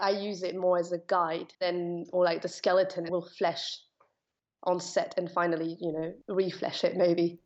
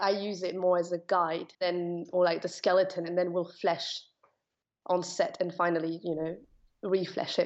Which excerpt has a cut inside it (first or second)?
first